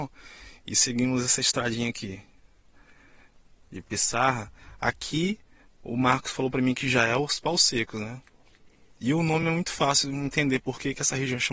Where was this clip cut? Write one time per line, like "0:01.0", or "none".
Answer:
none